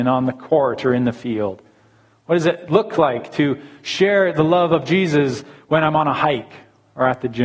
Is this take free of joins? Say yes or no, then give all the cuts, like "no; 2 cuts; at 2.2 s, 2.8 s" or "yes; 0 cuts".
yes; 0 cuts